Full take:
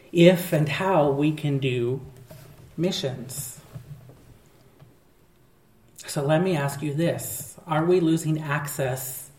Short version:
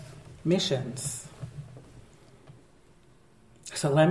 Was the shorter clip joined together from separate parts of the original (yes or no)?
no